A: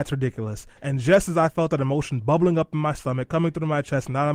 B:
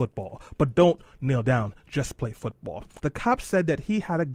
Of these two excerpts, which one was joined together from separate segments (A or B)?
B